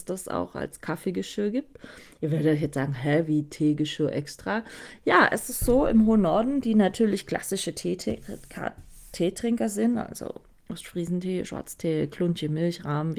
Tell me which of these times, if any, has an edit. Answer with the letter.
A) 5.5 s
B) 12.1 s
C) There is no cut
C